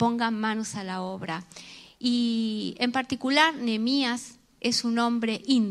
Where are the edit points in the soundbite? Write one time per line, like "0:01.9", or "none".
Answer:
none